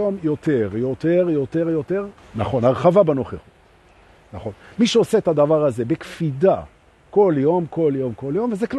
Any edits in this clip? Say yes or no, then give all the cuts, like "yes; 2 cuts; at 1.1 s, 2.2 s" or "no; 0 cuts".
yes; 1 cut; at 2.2 s